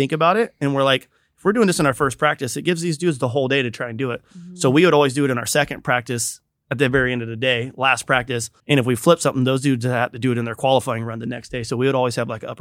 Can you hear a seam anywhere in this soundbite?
yes; 1 cut; at 8.6 s

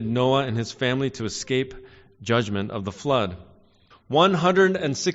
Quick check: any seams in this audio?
yes; 1 cut; at 3.9 s

